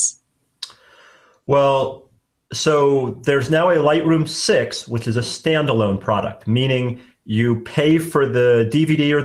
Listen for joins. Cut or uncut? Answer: uncut